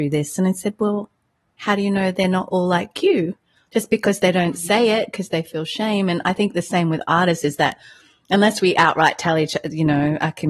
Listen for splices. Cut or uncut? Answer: uncut